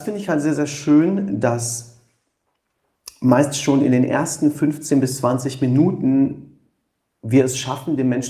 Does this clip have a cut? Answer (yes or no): no